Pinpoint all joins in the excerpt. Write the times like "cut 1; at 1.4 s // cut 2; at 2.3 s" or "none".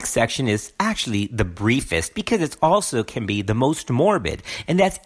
none